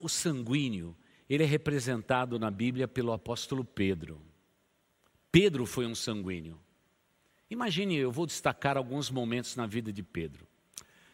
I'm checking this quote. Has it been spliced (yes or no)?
no